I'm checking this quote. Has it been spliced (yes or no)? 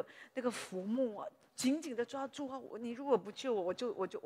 no